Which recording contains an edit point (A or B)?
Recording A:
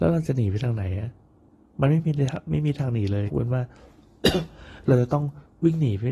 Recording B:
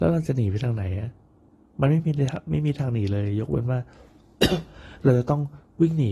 A